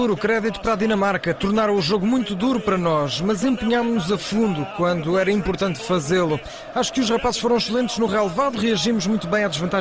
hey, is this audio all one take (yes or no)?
yes